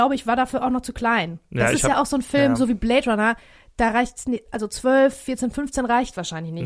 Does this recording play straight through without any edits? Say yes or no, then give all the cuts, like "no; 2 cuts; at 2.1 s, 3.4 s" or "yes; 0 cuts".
yes; 0 cuts